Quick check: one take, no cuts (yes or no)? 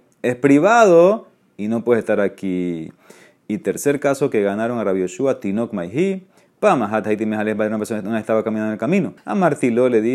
no